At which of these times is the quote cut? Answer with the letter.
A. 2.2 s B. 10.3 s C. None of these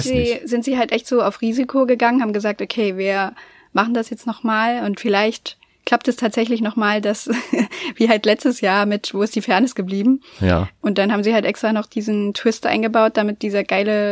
C